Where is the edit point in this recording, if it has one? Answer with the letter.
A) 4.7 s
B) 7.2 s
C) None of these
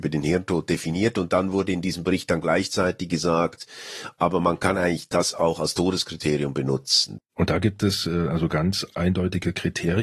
B